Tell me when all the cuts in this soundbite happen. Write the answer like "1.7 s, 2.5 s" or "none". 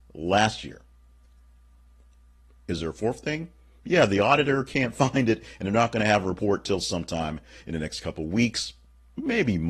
none